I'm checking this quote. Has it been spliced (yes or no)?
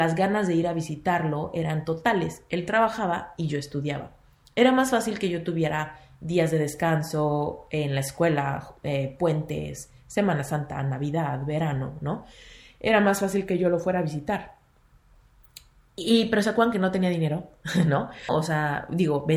yes